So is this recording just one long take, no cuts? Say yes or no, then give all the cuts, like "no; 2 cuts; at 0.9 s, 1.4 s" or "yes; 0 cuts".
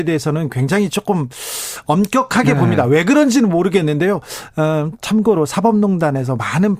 yes; 0 cuts